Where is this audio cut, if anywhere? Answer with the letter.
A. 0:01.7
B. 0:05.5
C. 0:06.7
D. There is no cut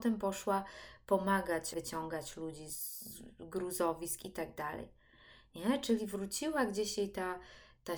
A